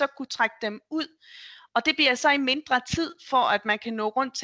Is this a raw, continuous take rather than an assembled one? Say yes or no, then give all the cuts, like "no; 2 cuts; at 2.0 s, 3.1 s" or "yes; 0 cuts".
yes; 0 cuts